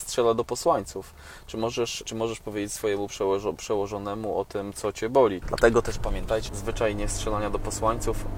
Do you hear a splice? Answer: yes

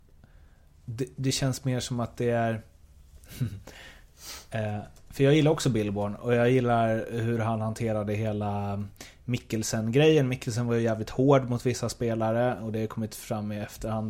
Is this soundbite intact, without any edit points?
yes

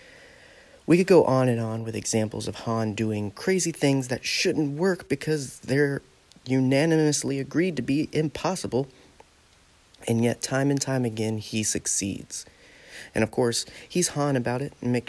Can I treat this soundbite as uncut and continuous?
yes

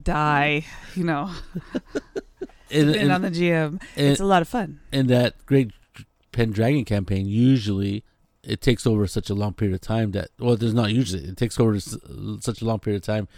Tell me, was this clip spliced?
no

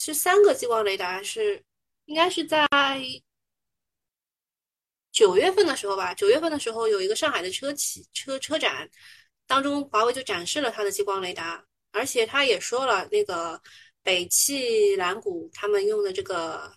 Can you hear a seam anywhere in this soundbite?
yes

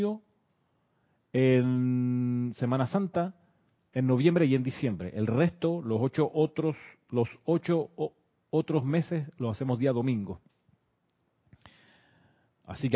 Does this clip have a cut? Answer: no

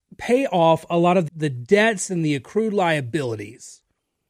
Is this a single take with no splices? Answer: no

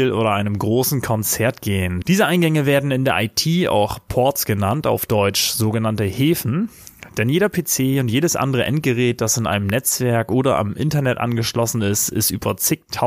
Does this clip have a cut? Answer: yes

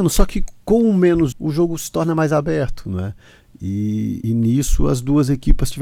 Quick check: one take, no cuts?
no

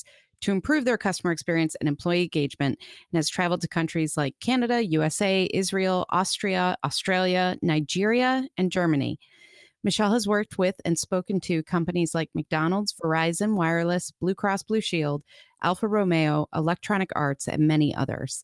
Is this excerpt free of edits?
yes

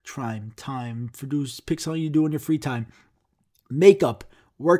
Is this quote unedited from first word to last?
yes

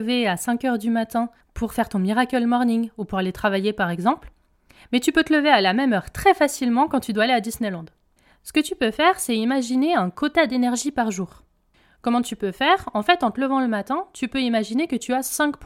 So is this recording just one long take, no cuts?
yes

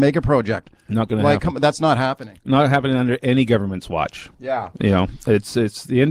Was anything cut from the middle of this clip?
yes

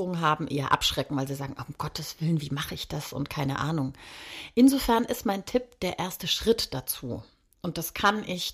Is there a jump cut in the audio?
no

